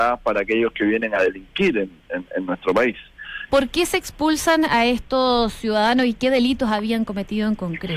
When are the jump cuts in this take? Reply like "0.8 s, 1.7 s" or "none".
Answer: 3.5 s